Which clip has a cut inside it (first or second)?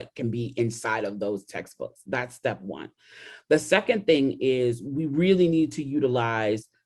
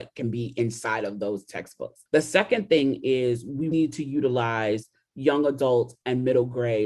second